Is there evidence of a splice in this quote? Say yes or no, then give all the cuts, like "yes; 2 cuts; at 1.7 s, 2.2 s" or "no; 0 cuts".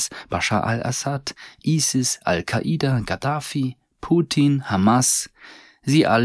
no; 0 cuts